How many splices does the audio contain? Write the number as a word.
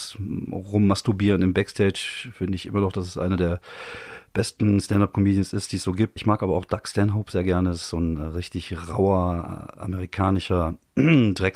one